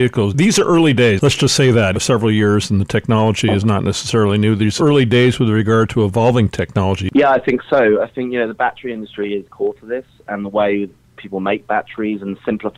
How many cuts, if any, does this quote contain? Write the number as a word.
three